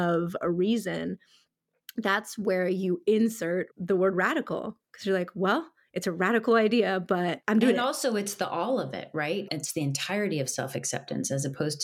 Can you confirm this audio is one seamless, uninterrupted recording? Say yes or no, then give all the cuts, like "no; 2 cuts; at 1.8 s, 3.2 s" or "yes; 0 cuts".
yes; 0 cuts